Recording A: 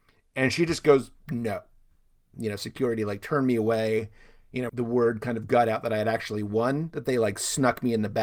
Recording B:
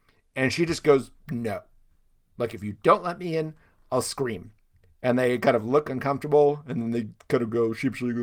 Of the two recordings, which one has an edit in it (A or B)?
A